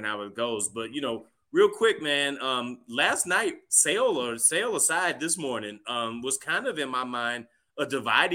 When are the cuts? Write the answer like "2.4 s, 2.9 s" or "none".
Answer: none